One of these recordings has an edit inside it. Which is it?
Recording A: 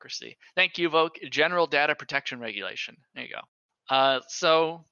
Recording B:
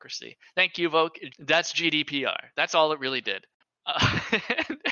B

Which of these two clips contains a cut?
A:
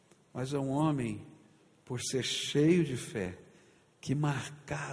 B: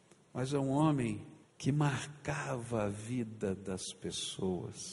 B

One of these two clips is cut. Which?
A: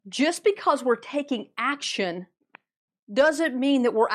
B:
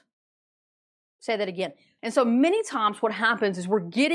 B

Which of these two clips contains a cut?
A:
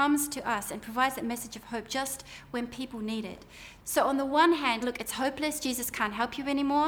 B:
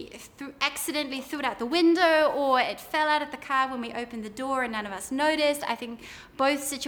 A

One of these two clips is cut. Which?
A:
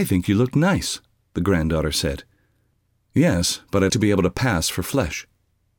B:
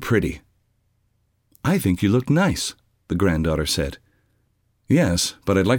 A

